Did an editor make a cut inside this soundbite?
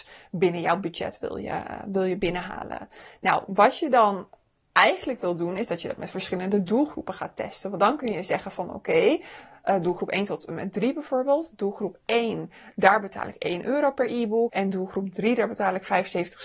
yes; 1 cut; at 14.5 s

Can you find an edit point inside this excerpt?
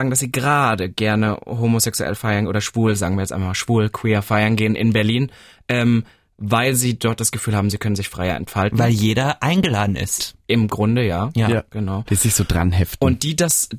yes; 2 cuts; at 10.2 s, 12.1 s

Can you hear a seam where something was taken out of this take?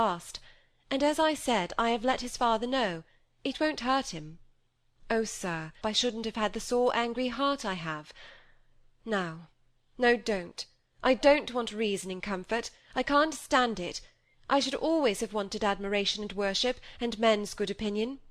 yes; 1 cut; at 5.8 s

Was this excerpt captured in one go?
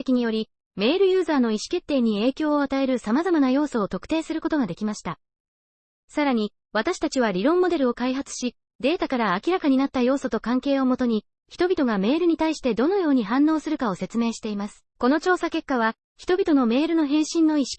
no; 1 cut; at 14.9 s

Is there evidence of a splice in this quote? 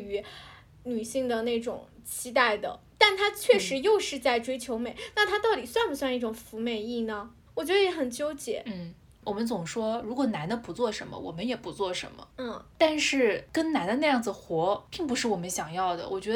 no; 0 cuts

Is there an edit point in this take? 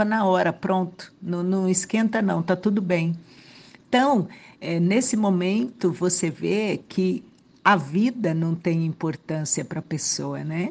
no; 0 cuts

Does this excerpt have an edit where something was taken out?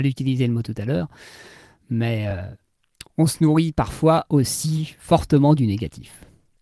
no; 0 cuts

